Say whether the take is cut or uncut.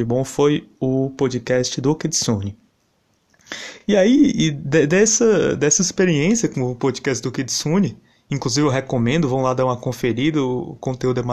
uncut